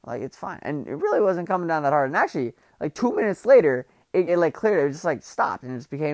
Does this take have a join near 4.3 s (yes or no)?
yes